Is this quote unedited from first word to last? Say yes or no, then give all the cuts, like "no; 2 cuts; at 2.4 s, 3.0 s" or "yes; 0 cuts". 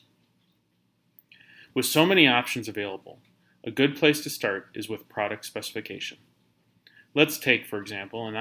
yes; 0 cuts